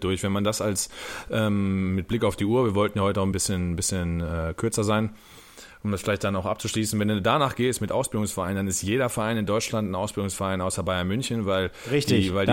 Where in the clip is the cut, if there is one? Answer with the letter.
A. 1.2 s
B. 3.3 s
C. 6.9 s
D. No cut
B